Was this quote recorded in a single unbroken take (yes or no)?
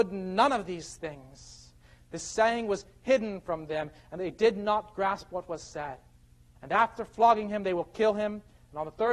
no